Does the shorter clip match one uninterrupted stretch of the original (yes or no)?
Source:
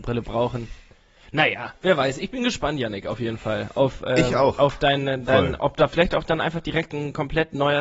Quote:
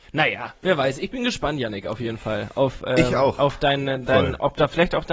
yes